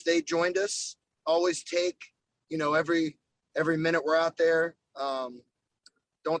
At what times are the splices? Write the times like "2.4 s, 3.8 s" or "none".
1.2 s